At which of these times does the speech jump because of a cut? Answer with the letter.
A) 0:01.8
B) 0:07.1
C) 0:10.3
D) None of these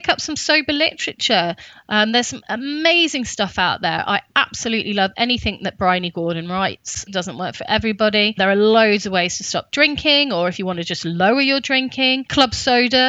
B